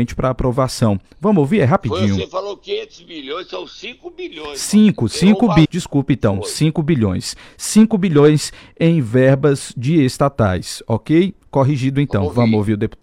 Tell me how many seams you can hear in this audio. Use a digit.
1